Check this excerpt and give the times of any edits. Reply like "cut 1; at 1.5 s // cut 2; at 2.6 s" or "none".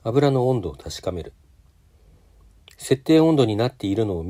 cut 1; at 2.6 s